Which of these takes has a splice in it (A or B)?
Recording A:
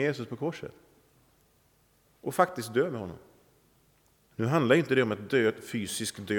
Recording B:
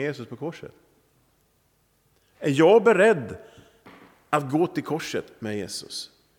A